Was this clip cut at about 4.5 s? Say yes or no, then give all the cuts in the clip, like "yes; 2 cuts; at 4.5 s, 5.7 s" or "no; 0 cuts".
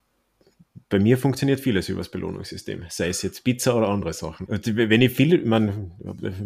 yes; 1 cut; at 4.5 s